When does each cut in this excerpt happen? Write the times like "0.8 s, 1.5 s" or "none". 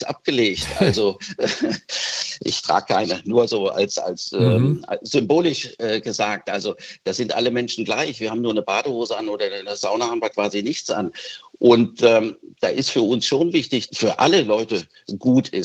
13.9 s